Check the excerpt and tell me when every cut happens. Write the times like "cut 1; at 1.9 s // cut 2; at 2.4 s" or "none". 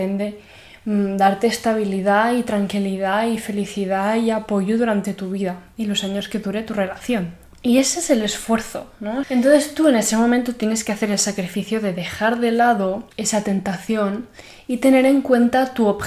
cut 1; at 9.2 s // cut 2; at 13.1 s